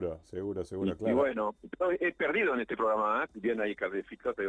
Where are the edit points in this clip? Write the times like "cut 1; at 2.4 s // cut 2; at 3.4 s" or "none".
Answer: cut 1; at 3.3 s

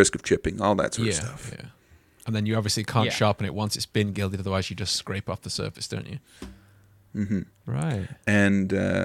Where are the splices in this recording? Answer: none

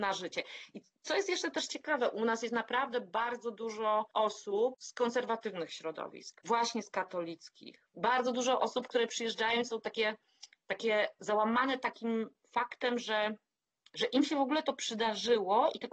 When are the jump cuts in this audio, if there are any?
none

